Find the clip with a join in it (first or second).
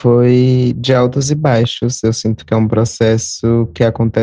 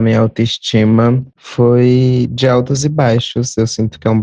second